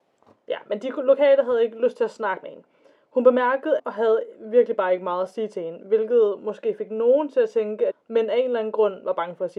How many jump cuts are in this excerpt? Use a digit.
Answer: 2